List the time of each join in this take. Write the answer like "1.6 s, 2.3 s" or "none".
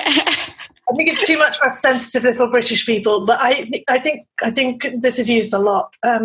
none